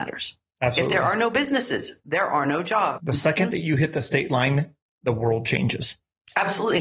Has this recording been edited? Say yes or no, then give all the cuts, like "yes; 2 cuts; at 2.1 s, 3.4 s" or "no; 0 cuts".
yes; 1 cut; at 3.0 s